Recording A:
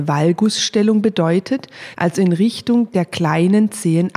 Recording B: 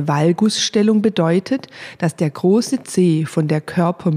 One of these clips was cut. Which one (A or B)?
A